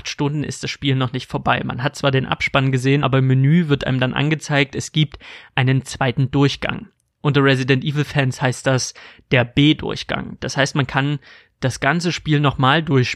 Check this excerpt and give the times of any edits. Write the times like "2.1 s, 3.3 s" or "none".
none